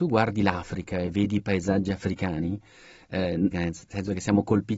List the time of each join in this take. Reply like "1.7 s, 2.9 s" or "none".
3.5 s